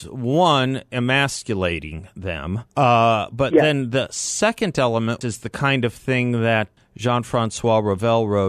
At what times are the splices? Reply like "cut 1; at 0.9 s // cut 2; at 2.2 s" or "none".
cut 1; at 2.7 s // cut 2; at 5.2 s // cut 3; at 6.8 s